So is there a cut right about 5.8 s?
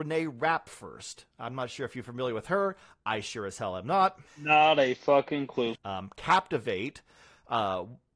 yes; 2 cuts; at 4.3 s, 5.8 s

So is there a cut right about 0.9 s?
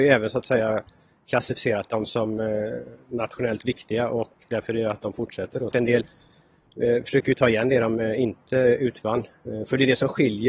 no; 1 cut; at 5.7 s

